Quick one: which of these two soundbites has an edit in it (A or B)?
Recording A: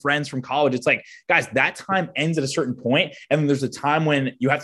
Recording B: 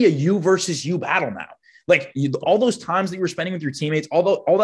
B